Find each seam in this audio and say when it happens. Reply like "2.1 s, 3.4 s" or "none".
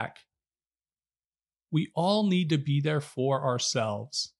1.6 s